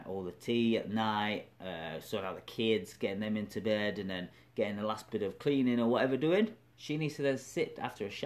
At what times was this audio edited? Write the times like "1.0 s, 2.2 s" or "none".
none

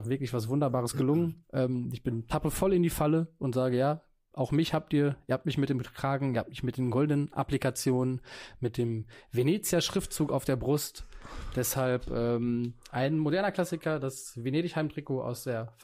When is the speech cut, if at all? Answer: none

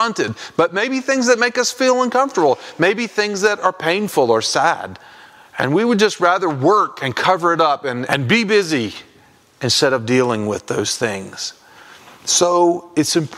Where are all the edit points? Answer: 8.1 s

